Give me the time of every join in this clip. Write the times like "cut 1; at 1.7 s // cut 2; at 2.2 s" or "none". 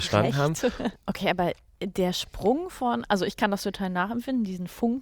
cut 1; at 0.9 s